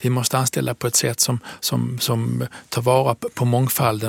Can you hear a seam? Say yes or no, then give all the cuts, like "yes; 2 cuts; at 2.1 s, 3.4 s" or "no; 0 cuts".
no; 0 cuts